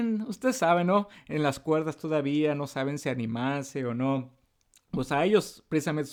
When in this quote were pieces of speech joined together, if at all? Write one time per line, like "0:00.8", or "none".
none